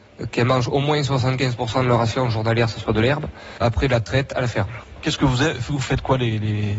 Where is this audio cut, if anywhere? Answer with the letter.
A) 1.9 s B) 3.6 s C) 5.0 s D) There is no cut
B